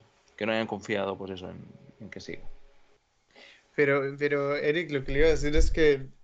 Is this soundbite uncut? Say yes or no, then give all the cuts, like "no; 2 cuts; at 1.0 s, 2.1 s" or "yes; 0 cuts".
yes; 0 cuts